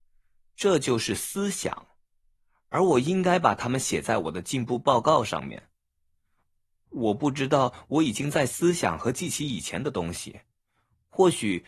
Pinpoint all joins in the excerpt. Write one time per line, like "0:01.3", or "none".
none